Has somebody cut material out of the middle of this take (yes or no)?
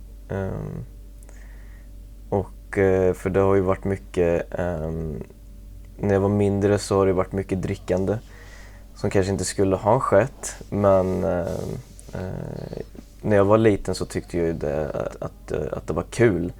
yes